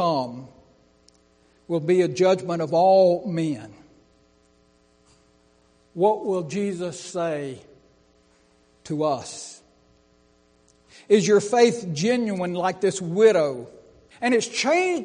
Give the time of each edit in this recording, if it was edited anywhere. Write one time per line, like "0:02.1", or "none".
0:14.1